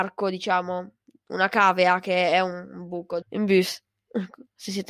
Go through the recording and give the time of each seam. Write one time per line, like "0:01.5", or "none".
0:03.2